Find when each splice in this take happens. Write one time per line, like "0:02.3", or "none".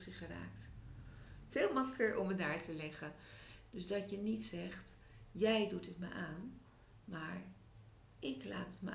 0:01.5
0:03.7